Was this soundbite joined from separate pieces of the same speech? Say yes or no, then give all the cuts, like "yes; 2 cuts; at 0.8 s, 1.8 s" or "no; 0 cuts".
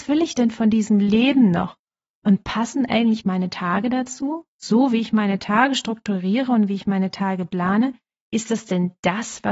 no; 0 cuts